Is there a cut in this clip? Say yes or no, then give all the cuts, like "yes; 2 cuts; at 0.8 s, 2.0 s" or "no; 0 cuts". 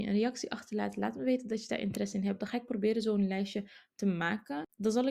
no; 0 cuts